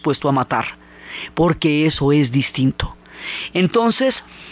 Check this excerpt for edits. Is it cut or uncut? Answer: uncut